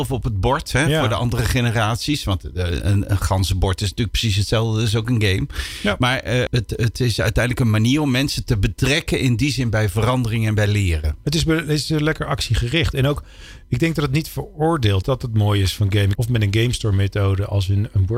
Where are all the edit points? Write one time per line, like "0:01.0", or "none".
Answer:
0:06.5
0:15.0
0:16.2